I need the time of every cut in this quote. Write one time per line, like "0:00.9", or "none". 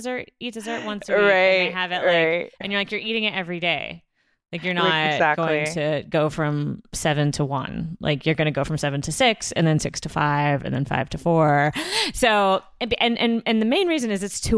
none